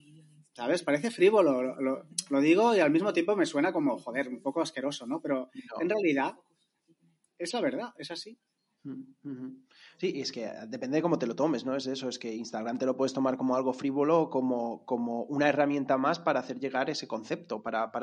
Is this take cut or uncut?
uncut